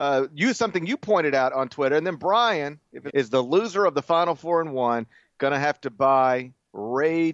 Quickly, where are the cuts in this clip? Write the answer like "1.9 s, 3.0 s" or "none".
3.1 s